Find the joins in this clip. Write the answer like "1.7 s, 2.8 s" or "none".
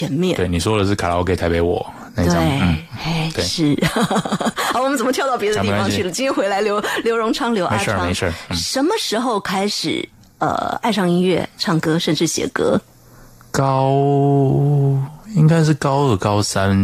11.6 s

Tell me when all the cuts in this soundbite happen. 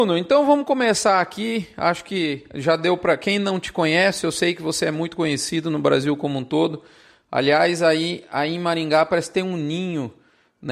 none

